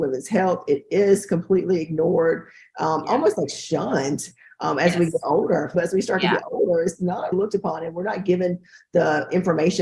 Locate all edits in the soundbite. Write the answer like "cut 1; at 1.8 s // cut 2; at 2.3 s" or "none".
cut 1; at 5.7 s // cut 2; at 7.3 s

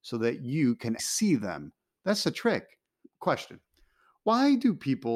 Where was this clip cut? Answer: cut 1; at 1.0 s // cut 2; at 3.0 s

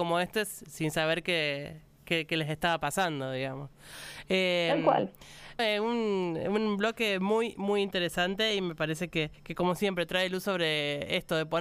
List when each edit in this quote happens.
cut 1; at 5.6 s // cut 2; at 9.3 s

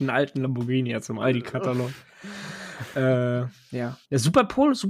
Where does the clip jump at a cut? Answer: none

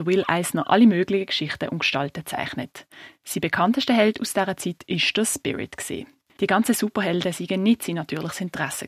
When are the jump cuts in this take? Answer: cut 1; at 6.4 s

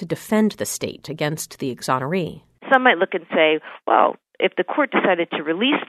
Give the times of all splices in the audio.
none

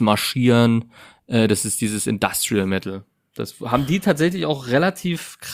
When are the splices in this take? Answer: none

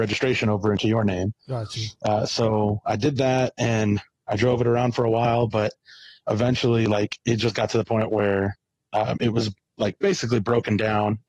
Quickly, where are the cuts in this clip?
none

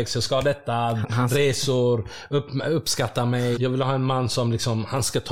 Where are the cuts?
cut 1; at 1.0 s // cut 2; at 3.6 s

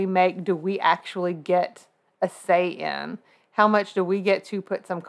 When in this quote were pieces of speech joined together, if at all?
none

